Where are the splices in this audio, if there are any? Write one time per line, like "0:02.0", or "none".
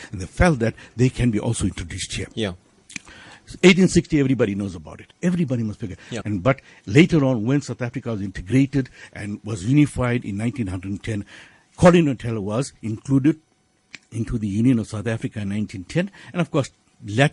0:05.1
0:06.2